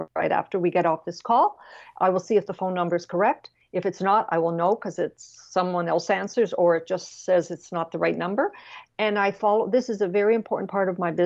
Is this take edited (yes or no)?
yes